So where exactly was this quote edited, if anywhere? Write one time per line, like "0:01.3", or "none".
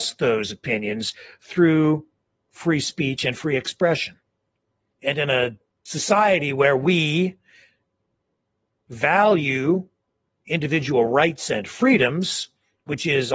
0:04.9